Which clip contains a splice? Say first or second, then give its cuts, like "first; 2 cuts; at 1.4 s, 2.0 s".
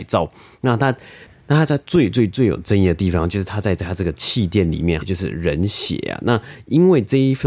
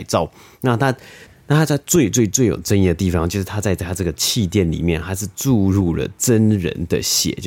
first; 1 cut; at 5.0 s